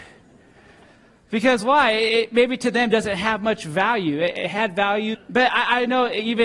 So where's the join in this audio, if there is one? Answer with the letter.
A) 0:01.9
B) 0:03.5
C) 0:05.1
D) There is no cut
C